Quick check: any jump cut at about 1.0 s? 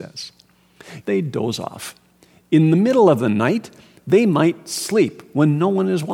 yes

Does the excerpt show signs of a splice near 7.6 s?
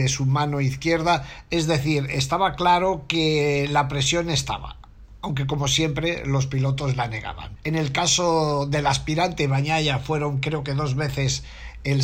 yes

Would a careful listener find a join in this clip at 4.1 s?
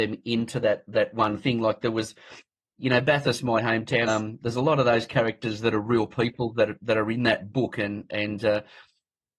yes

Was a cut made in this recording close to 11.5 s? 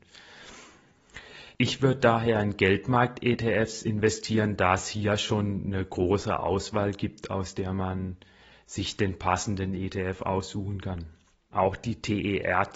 yes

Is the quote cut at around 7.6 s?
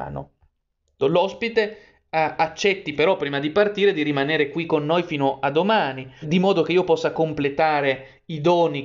no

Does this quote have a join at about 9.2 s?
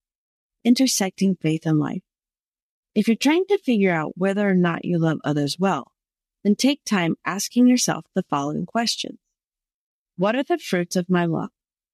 no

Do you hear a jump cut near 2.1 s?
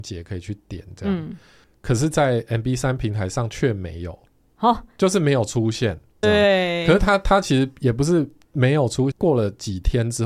no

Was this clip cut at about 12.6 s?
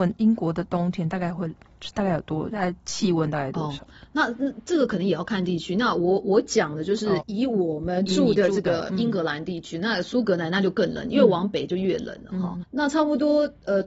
yes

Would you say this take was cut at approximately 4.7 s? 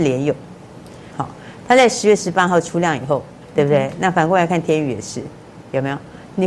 no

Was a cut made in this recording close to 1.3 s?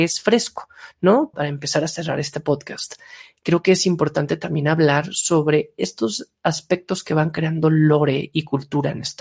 yes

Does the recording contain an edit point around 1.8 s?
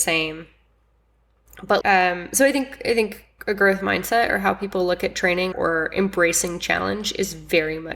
yes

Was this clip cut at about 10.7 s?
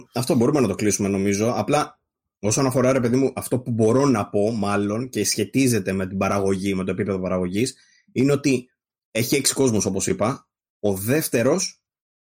no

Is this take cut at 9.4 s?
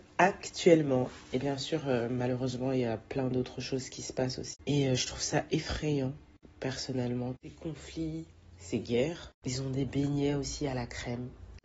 yes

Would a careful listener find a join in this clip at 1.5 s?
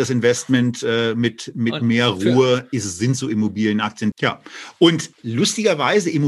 no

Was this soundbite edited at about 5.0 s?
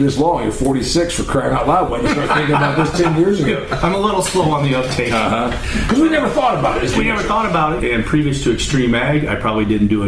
no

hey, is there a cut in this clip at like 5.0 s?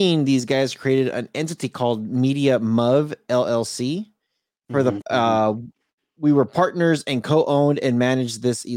yes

